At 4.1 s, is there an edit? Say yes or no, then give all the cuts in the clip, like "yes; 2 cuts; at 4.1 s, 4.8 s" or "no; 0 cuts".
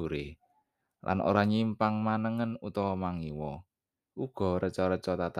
yes; 1 cut; at 4.1 s